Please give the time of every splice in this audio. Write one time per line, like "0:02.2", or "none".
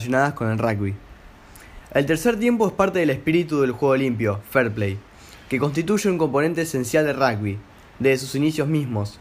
none

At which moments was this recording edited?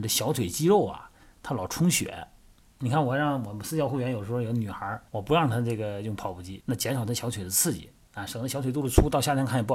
0:05.1
0:06.6

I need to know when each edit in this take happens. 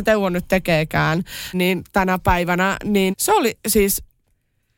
0:01.5
0:03.1

